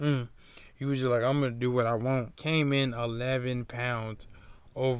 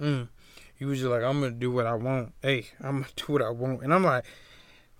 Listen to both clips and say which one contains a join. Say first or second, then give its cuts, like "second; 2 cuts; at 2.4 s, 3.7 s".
first; 1 cut; at 2.3 s